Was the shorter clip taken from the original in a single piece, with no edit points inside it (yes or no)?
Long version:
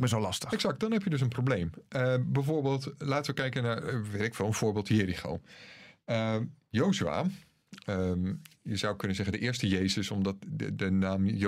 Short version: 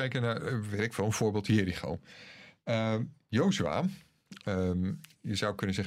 yes